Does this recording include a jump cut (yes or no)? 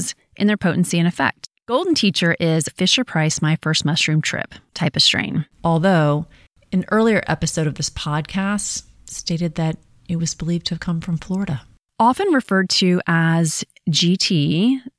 yes